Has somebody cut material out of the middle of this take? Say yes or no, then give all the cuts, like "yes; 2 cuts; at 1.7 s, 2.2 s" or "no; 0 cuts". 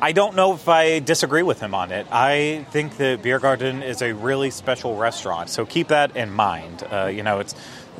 yes; 1 cut; at 5.5 s